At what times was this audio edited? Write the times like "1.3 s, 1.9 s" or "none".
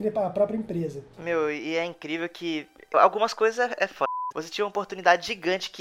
1.1 s, 2.9 s, 4.3 s